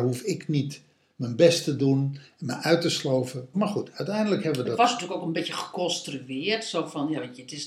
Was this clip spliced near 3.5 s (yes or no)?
yes